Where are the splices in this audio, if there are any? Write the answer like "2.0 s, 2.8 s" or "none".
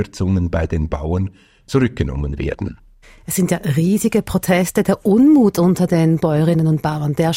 none

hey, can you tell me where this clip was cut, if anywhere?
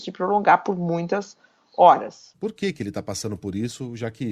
2.3 s

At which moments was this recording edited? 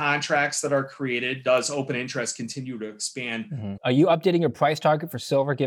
3.8 s

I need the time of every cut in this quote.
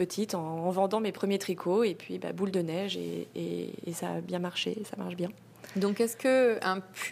none

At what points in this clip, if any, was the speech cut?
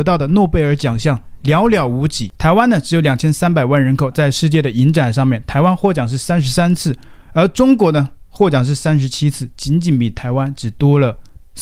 4.1 s

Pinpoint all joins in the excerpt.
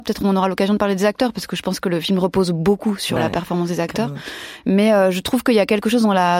none

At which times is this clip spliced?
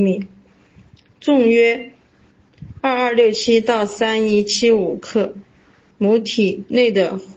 none

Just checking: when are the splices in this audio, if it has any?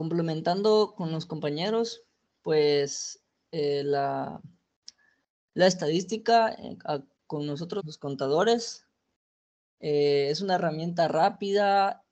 7.8 s

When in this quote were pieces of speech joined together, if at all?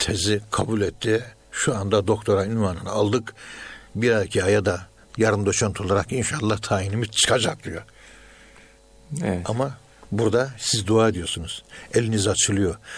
none

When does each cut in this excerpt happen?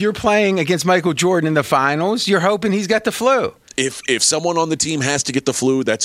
none

